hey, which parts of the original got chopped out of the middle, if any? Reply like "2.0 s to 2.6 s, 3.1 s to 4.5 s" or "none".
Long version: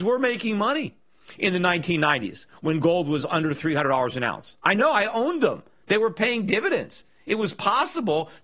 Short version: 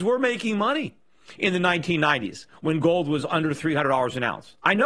none